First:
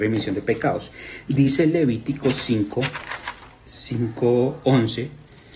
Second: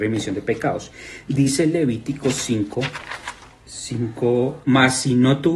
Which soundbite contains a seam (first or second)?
second